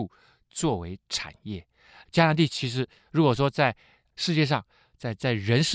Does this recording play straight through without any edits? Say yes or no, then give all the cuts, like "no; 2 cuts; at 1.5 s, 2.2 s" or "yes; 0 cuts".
no; 1 cut; at 2.0 s